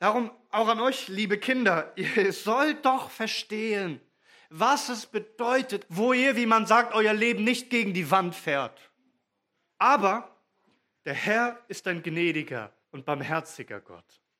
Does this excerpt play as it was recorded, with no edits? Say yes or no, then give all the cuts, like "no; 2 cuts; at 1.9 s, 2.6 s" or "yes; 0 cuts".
no; 3 cuts; at 5.9 s, 9.7 s, 12.8 s